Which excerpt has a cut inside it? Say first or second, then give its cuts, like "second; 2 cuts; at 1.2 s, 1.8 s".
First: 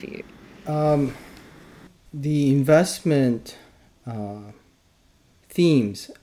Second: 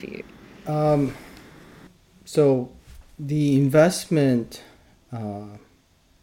first; 1 cut; at 2.1 s